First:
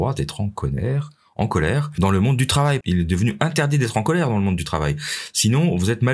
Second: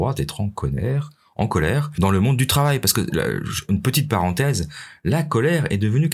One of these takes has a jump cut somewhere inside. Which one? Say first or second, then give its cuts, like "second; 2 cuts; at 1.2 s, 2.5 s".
first; 1 cut; at 2.8 s